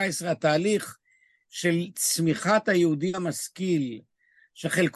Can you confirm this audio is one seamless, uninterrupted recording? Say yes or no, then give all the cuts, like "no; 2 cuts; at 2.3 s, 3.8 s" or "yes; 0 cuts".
yes; 0 cuts